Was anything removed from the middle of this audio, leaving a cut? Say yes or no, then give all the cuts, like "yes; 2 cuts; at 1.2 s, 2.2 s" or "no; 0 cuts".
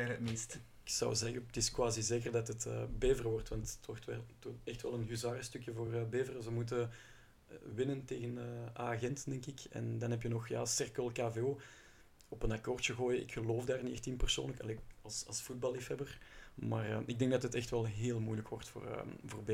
no; 0 cuts